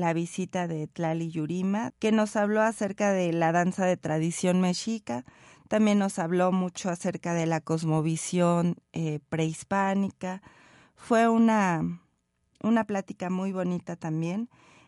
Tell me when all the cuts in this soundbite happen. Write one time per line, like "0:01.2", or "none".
0:01.9